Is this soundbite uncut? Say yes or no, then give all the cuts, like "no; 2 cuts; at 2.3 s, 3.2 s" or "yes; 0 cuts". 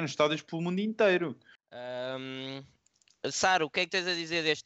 no; 1 cut; at 1.6 s